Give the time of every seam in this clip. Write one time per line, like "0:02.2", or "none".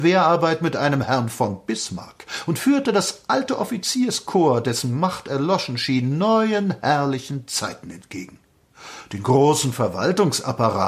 none